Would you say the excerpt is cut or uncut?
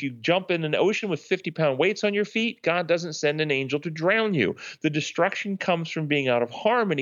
uncut